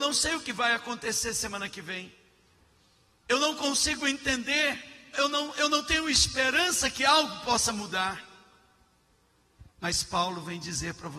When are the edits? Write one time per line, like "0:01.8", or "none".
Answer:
0:05.1
0:09.7